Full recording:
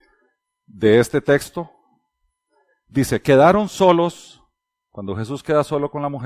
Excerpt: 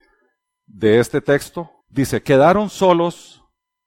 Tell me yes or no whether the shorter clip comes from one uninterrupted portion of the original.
no